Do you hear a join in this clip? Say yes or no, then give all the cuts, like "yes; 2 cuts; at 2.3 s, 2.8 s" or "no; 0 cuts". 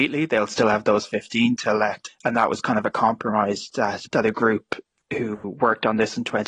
yes; 2 cuts; at 2.1 s, 4.1 s